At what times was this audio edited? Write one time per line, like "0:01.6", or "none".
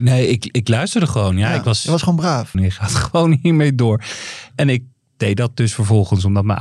0:02.5